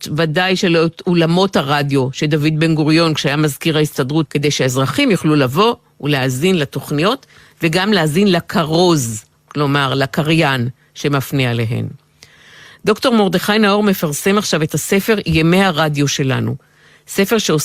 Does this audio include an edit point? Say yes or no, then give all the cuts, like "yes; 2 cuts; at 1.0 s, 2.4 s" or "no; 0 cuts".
yes; 1 cut; at 4.3 s